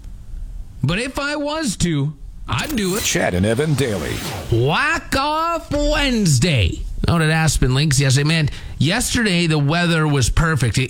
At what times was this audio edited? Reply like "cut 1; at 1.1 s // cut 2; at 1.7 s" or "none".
none